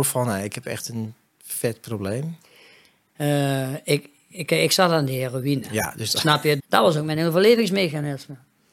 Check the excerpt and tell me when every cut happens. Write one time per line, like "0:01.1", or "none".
0:06.6